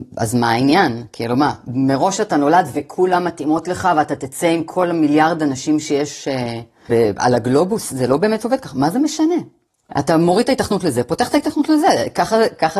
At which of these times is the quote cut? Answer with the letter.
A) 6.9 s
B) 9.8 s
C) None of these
A